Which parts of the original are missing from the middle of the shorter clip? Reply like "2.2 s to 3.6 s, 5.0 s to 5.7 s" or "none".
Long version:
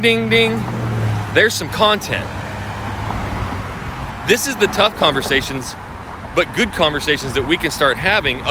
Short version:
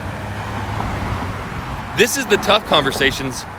none